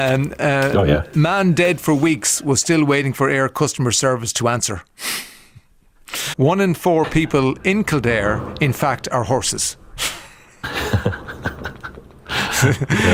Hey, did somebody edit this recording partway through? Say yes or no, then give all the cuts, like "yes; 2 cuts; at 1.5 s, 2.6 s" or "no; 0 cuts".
yes; 1 cut; at 6.3 s